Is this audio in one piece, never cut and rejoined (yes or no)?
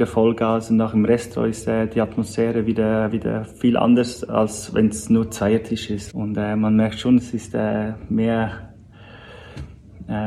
no